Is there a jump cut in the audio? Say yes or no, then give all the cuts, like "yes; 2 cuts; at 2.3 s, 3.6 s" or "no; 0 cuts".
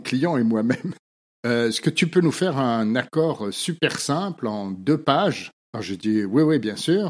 yes; 2 cuts; at 1.4 s, 5.6 s